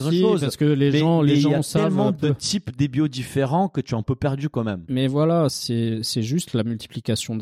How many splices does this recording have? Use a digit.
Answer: 1